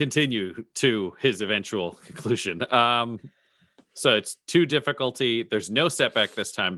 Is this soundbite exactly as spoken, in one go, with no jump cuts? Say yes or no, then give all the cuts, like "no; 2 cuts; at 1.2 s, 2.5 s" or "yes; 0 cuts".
yes; 0 cuts